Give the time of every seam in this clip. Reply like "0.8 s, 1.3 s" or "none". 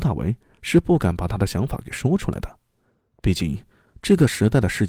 3.1 s